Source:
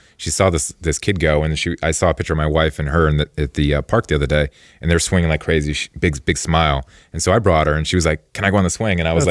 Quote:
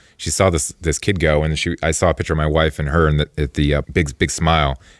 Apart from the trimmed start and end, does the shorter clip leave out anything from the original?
yes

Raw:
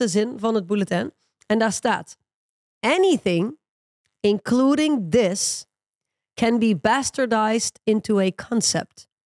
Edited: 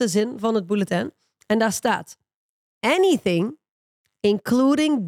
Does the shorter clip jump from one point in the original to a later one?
no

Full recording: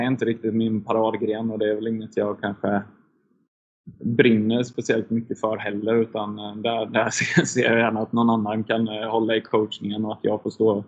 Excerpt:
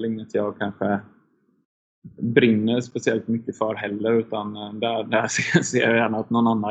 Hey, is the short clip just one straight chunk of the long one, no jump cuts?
yes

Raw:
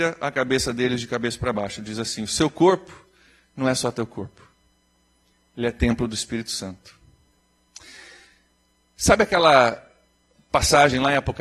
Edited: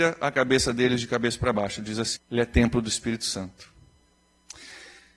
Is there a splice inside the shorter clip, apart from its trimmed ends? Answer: yes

